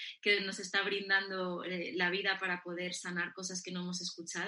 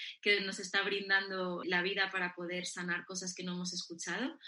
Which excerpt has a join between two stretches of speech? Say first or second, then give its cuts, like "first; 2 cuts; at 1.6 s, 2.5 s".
second; 1 cut; at 1.6 s